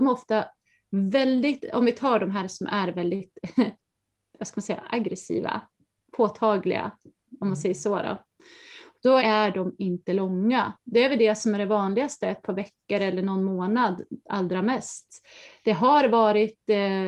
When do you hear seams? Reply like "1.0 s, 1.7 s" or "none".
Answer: 9.2 s, 10.7 s